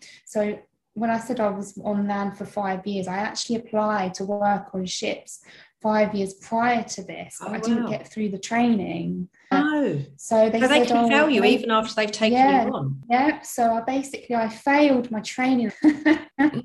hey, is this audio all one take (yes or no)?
no